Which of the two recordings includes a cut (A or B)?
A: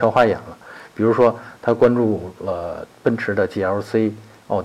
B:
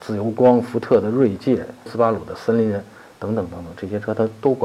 B